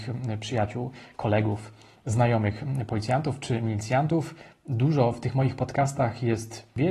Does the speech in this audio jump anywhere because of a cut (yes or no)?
no